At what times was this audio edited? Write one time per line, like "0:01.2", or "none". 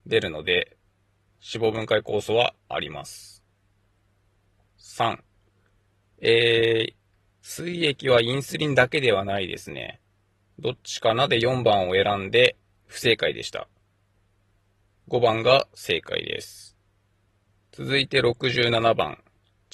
0:10.5